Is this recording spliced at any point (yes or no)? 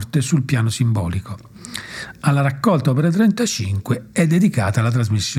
no